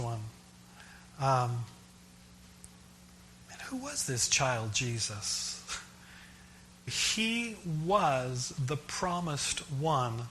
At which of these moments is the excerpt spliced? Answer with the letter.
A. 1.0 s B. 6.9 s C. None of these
B